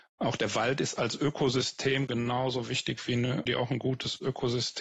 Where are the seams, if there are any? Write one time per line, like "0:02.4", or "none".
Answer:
0:03.5